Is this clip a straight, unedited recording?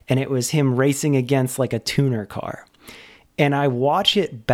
yes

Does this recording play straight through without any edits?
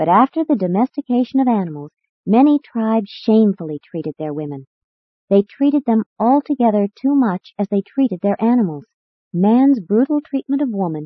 no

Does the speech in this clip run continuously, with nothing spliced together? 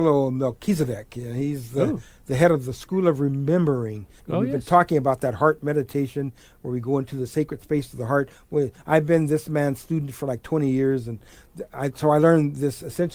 no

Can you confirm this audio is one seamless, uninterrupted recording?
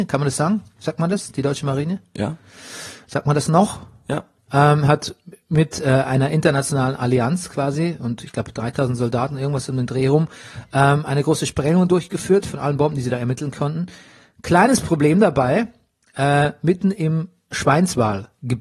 yes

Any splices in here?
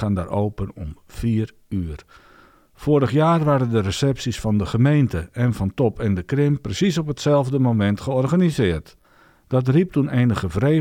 no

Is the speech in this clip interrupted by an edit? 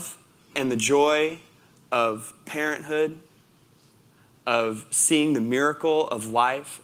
no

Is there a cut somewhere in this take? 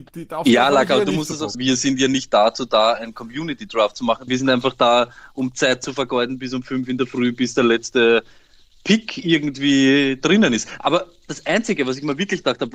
yes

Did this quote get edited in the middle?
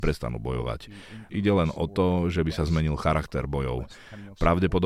yes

